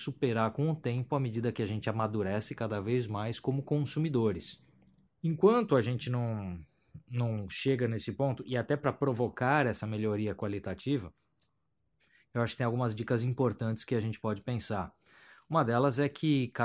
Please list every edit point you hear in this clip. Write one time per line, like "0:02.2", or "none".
0:05.1